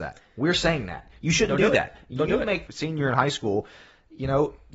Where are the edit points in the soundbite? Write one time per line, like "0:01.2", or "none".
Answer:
0:02.7

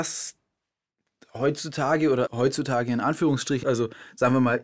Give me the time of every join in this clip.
0:02.3
0:03.6

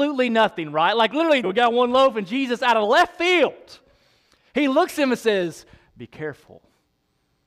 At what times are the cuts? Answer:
0:01.4

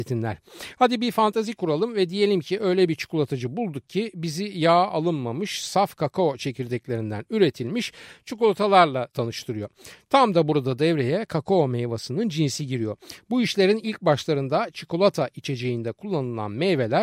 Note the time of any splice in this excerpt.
none

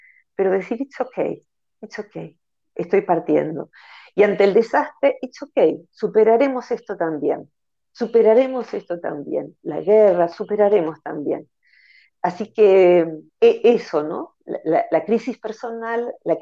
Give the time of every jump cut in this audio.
0:13.3

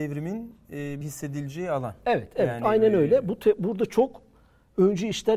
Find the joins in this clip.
0:01.0

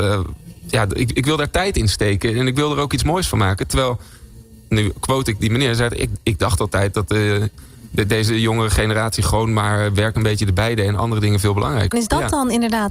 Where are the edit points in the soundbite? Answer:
0:11.9

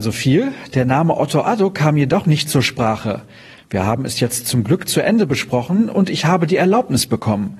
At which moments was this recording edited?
0:03.6

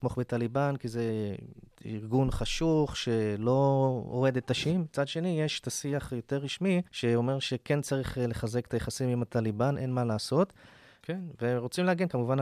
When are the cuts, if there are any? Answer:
0:06.9
0:11.0

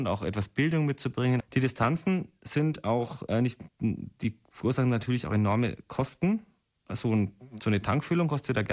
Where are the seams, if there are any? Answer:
0:01.4

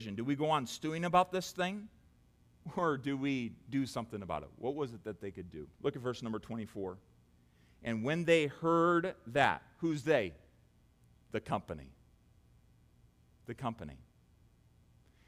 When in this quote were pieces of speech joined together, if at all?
0:05.7

